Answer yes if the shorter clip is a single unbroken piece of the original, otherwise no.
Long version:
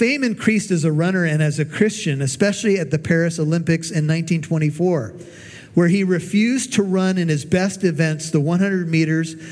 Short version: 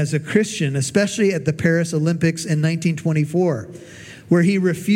yes